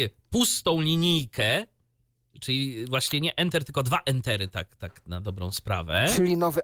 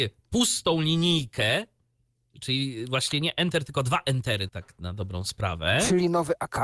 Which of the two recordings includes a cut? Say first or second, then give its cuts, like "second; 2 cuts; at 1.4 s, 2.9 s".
second; 1 cut; at 4.5 s